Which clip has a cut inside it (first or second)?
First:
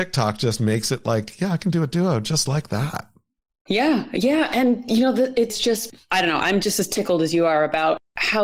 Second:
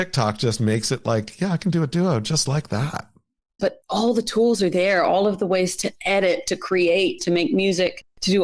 second